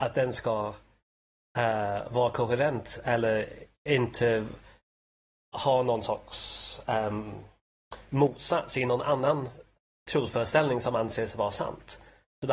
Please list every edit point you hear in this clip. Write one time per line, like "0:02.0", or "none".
none

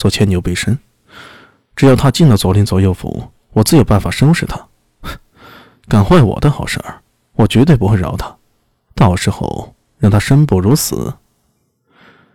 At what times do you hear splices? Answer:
none

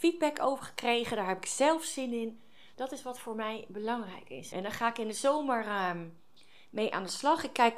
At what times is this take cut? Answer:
0:02.7
0:04.5

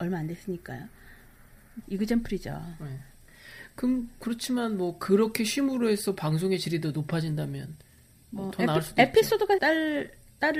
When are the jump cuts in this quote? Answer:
0:01.8
0:09.6

